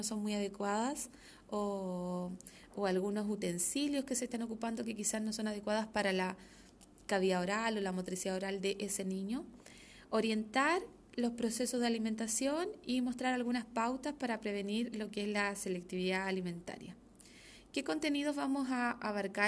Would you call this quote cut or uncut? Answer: uncut